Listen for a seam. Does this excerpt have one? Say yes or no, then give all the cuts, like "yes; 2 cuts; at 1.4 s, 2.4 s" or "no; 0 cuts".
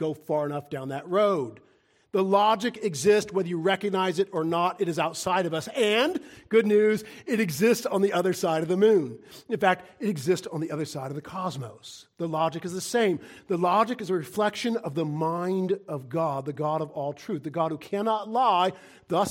no; 0 cuts